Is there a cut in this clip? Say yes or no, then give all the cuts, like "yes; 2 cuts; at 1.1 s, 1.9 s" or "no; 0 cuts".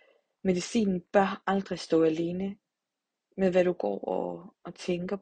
yes; 1 cut; at 3.2 s